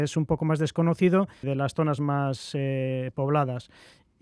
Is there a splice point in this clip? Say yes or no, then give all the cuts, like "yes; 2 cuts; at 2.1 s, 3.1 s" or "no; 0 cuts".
yes; 1 cut; at 1.4 s